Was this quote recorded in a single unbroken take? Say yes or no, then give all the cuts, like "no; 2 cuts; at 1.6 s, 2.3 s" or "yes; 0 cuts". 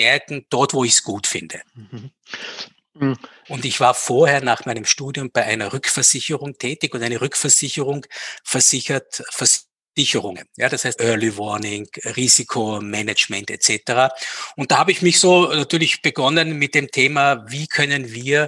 no; 2 cuts; at 3.4 s, 11.0 s